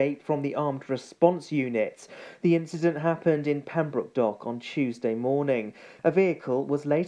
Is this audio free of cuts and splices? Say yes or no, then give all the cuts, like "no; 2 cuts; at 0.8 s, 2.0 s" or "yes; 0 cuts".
no; 1 cut; at 6.0 s